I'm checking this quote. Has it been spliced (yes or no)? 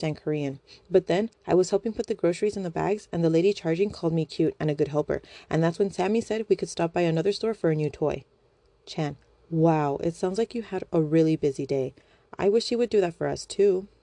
yes